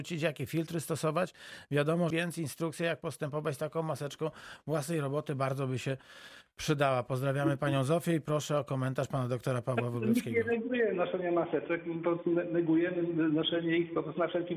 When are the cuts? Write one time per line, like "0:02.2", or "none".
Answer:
0:02.1